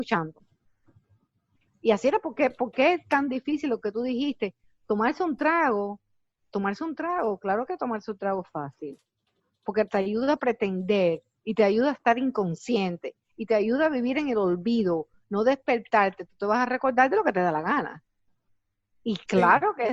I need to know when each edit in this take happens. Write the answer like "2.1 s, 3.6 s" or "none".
none